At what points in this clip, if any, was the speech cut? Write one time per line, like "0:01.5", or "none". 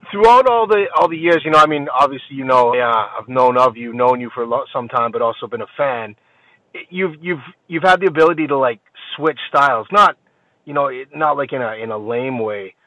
0:02.7